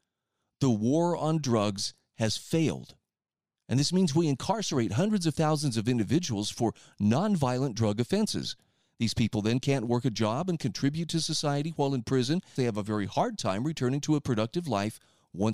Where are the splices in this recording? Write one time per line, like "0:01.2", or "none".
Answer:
0:03.5
0:12.6